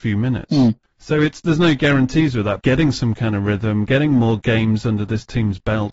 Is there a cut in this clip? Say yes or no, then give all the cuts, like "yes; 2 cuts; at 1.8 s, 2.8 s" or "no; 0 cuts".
yes; 1 cut; at 2.6 s